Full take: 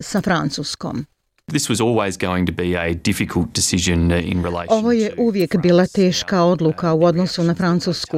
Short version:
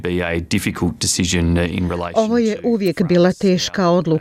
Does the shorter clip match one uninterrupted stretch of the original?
yes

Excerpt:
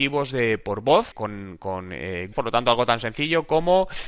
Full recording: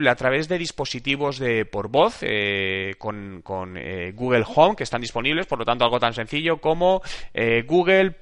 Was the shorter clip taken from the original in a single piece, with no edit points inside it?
no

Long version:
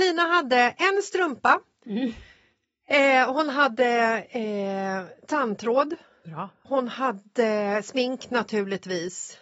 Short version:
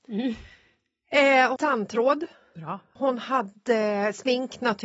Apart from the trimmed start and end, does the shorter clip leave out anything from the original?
yes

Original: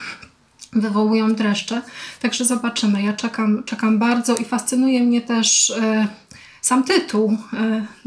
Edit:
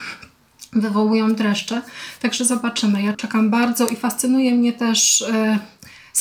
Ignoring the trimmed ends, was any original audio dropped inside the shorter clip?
yes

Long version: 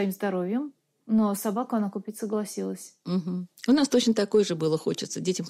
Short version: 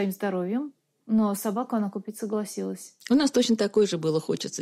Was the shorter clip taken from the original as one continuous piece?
no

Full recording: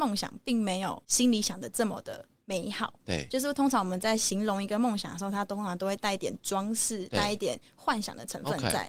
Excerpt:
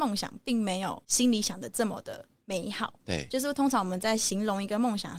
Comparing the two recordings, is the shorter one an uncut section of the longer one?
yes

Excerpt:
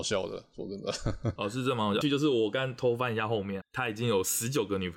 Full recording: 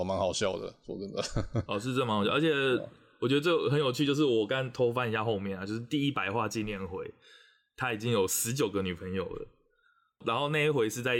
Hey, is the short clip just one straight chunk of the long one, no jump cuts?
no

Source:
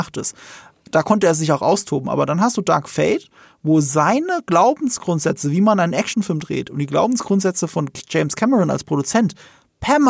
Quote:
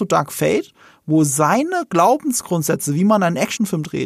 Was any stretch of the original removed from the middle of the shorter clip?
no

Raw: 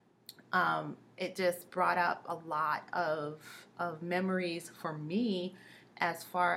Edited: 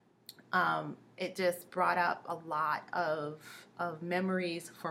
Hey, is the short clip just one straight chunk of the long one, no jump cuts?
yes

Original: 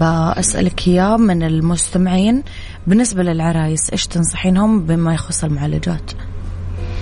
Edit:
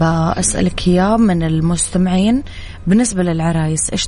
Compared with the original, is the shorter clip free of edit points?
yes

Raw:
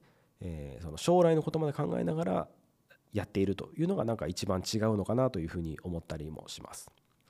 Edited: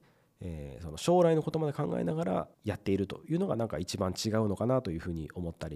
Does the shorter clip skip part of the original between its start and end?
yes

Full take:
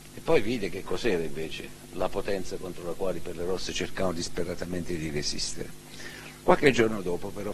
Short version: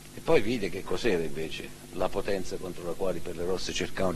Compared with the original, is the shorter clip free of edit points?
yes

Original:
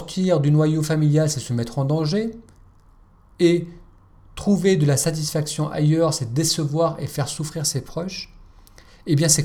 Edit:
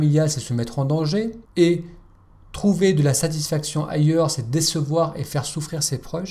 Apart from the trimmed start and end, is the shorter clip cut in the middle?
yes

